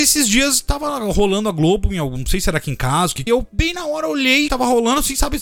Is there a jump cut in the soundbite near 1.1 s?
no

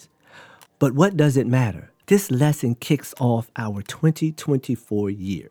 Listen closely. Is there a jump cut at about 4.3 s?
no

